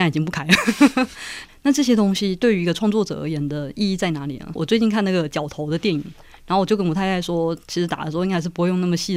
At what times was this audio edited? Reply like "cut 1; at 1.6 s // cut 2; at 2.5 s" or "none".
cut 1; at 1.5 s // cut 2; at 4.5 s